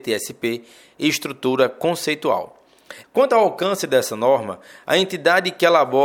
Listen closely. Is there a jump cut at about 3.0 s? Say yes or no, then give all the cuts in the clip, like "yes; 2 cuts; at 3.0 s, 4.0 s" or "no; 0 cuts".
yes; 1 cut; at 3.0 s